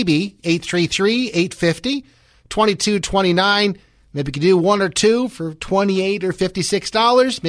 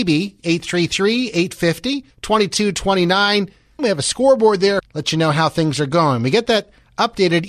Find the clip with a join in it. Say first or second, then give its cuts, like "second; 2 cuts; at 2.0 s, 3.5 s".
second; 3 cuts; at 2.1 s, 3.8 s, 4.8 s